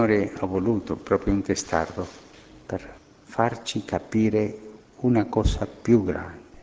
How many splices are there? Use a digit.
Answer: 0